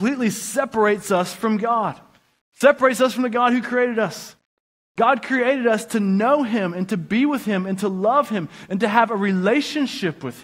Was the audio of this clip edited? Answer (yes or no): no